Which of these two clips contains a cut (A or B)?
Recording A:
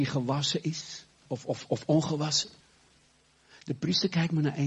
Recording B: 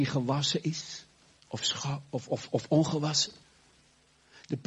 A